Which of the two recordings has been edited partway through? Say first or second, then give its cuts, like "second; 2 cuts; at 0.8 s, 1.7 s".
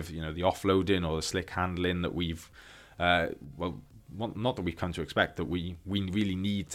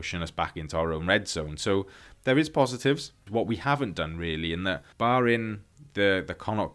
second; 2 cuts; at 3.3 s, 4.9 s